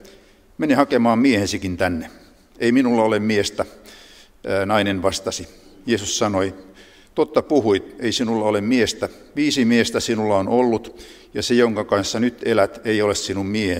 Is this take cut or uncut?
uncut